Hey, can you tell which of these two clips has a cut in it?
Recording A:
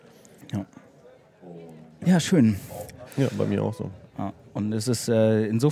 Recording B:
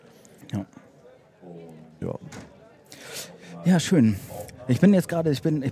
A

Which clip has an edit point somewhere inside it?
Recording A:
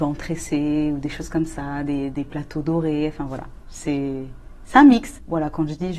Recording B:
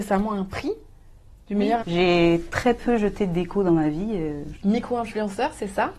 B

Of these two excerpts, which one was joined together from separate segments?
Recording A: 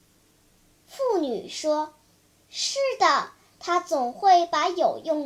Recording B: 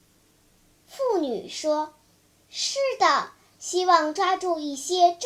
B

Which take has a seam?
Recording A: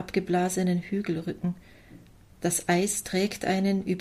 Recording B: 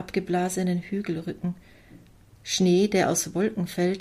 B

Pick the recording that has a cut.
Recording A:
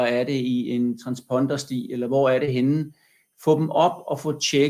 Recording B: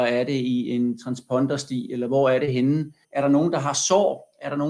B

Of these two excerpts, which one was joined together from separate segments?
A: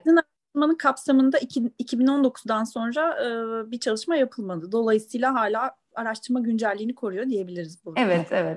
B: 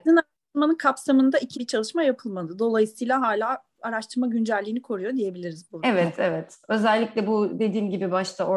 B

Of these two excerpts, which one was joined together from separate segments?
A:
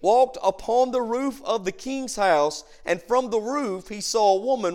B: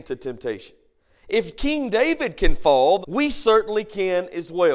B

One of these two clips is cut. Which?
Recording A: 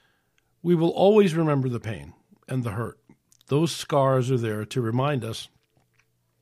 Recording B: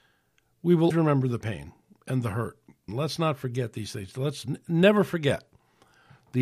B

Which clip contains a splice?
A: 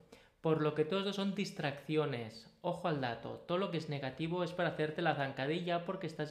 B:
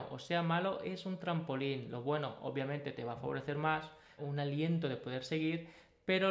B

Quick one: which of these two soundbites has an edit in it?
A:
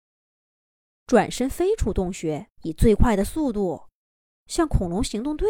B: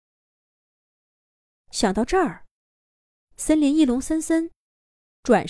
A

